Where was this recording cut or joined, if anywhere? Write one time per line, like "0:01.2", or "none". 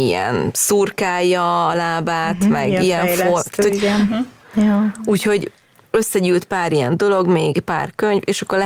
0:04.4